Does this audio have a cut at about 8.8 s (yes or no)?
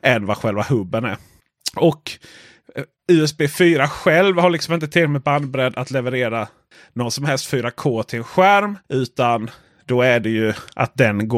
yes